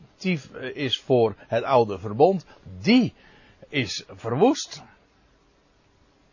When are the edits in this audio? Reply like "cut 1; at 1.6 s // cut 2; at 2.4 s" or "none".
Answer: none